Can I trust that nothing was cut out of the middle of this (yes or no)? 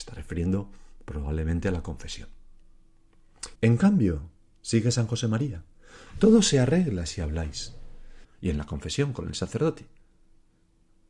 no